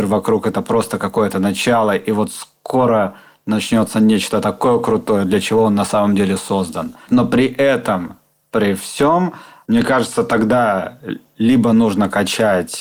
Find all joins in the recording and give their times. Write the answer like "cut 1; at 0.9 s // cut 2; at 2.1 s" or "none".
cut 1; at 7.1 s